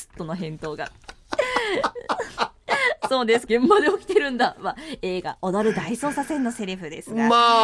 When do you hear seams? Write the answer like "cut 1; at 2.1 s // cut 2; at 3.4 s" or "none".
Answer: cut 1; at 3.5 s